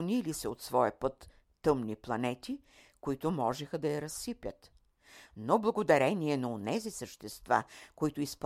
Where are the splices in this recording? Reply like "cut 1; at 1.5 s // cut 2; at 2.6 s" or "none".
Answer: none